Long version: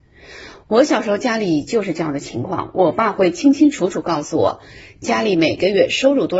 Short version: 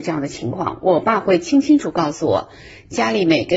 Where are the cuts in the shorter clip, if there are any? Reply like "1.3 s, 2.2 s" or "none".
1.8 s